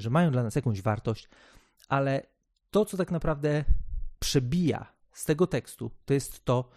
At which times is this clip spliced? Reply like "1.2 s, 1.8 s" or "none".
none